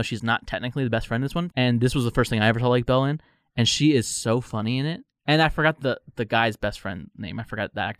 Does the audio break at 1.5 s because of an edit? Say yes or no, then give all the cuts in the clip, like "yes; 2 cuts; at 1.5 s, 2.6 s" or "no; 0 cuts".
yes; 1 cut; at 1.5 s